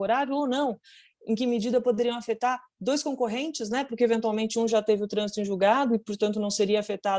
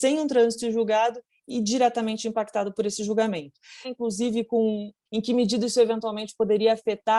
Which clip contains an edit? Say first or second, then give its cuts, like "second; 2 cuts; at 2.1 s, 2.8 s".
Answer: second; 2 cuts; at 3.8 s, 5.1 s